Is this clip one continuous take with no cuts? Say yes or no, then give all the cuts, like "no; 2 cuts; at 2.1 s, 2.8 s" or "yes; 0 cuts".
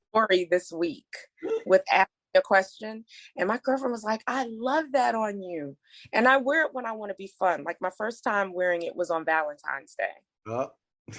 yes; 0 cuts